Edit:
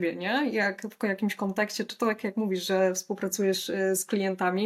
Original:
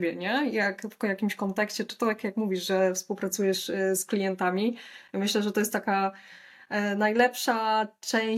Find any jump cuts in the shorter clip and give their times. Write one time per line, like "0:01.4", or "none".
none